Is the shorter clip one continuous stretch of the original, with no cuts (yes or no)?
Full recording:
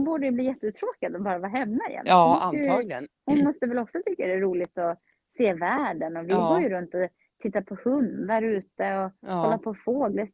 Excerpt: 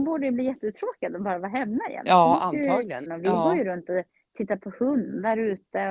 no